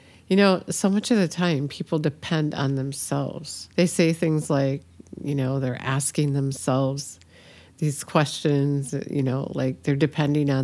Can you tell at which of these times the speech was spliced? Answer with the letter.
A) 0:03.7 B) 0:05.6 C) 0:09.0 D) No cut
A